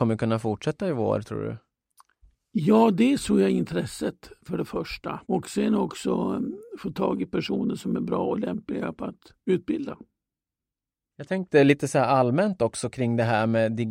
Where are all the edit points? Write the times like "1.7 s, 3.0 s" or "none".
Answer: 5.2 s